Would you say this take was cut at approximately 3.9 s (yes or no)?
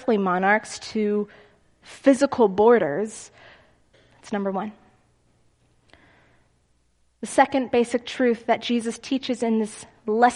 yes